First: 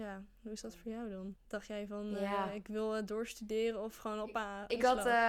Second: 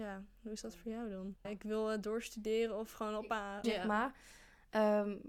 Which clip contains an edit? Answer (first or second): second